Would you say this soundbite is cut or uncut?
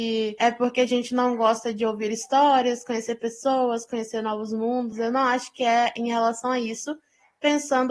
uncut